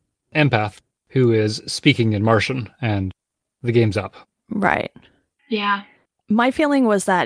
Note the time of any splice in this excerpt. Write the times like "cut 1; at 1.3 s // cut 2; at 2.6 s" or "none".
none